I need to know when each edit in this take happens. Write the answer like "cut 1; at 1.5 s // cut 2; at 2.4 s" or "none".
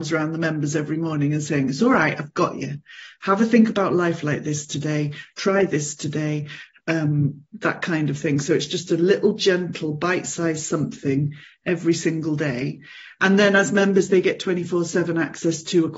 cut 1; at 7.5 s